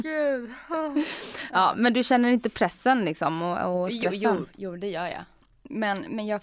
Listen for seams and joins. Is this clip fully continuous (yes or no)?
yes